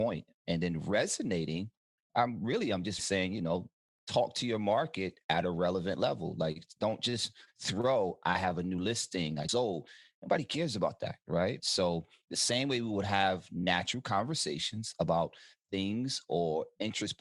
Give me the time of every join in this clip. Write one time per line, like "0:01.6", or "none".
0:03.0
0:09.5
0:11.6